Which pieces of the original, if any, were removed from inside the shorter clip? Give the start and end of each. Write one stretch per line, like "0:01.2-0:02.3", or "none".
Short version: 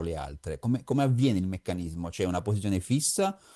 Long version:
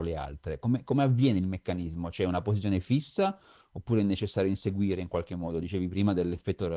none